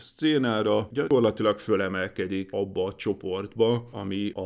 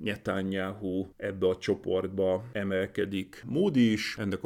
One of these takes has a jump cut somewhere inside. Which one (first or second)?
second